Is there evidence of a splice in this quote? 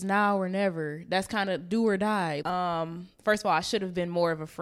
yes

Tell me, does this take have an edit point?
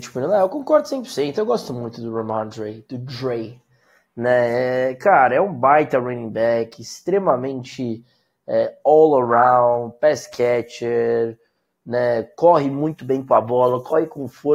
no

